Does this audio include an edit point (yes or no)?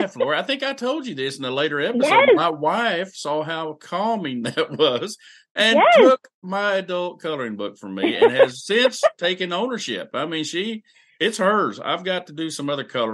no